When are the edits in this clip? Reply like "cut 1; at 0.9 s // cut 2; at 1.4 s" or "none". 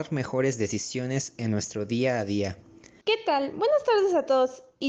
cut 1; at 3.0 s